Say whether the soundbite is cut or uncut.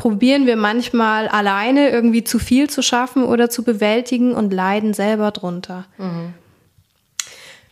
uncut